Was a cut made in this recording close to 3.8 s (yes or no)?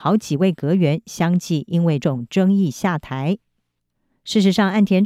no